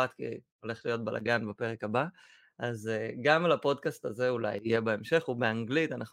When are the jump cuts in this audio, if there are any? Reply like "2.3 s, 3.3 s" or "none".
none